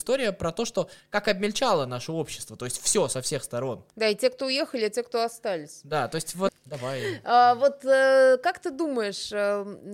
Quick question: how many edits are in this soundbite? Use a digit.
2